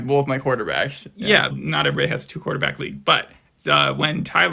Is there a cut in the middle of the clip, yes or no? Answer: yes